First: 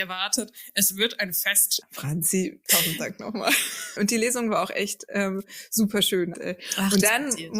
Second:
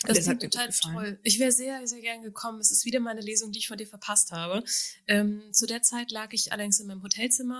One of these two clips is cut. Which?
first; 3 cuts; at 1.8 s, 4.0 s, 6.3 s

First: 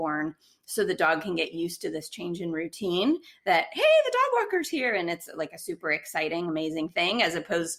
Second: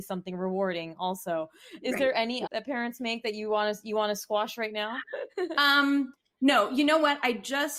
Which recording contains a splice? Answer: second; 2 cuts; at 2.4 s, 5.5 s

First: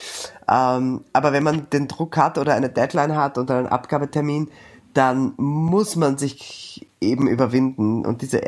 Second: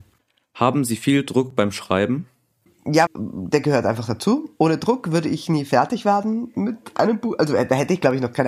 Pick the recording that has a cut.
second; 1 cut; at 3.1 s

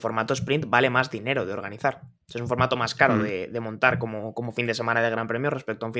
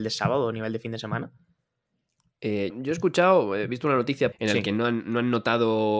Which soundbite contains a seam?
second; 2 cuts; at 2.7 s, 4.3 s

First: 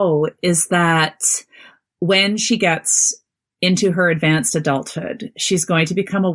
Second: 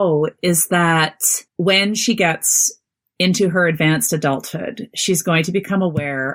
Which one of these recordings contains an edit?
second; 1 cut; at 1.5 s

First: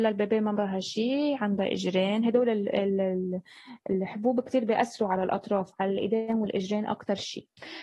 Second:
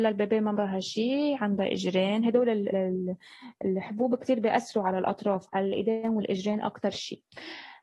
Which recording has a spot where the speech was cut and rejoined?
second; 1 cut; at 2.7 s

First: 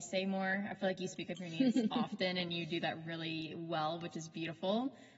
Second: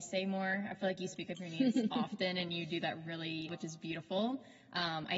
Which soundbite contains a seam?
second; 1 cut; at 3.5 s

